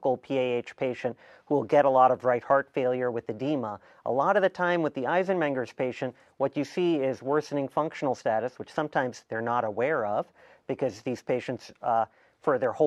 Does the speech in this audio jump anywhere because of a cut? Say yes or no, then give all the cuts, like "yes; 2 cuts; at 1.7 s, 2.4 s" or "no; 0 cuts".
no; 0 cuts